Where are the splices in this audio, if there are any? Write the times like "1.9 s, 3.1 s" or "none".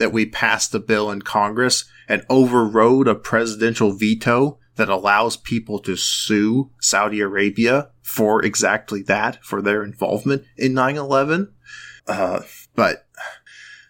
12.0 s